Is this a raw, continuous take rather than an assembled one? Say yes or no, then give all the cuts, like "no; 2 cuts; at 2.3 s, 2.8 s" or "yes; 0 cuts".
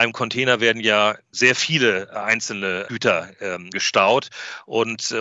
yes; 0 cuts